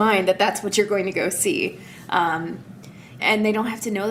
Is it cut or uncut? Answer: cut